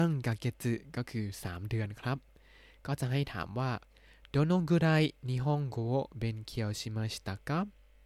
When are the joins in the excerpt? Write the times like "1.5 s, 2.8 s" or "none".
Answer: none

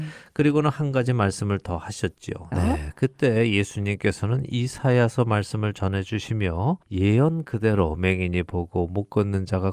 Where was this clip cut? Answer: 2.5 s, 6.8 s

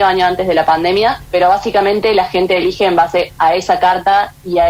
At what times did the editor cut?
1.2 s

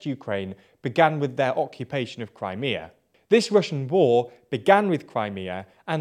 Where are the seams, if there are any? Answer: none

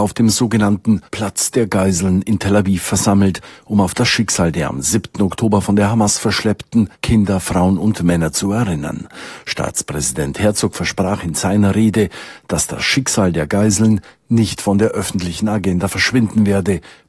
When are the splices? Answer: none

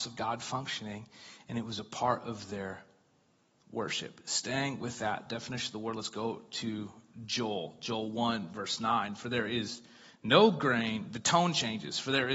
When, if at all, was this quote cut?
none

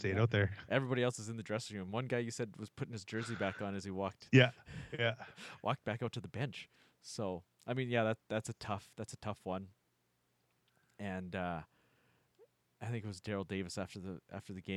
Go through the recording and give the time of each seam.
none

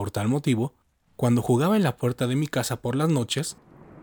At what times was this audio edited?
1.1 s

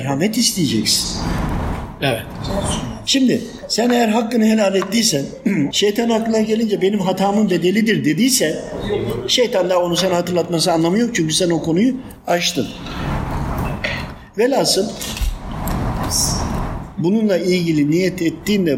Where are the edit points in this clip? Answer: 5.7 s

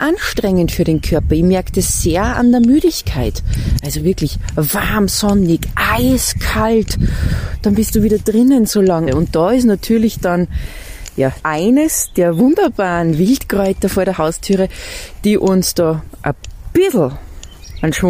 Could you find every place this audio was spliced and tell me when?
9.1 s, 11.4 s

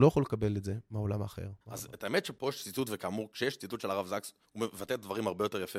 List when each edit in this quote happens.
1.6 s

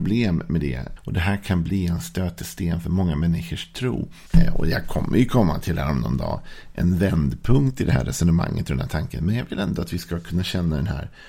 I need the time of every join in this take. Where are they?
1.0 s, 4.3 s

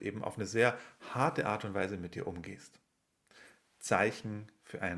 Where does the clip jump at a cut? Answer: none

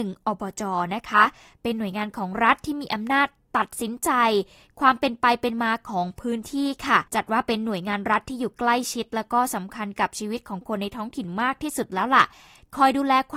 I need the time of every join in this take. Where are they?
7.1 s

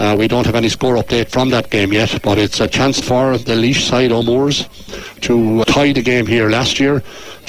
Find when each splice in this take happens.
3.0 s, 5.6 s

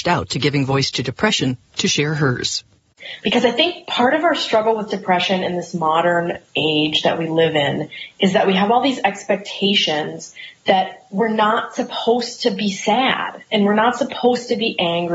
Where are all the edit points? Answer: none

